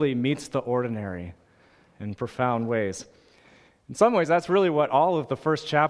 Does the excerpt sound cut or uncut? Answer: uncut